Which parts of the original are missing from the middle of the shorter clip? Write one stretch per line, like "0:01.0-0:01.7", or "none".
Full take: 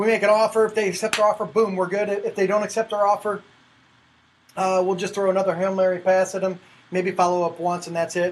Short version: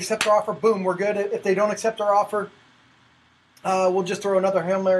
none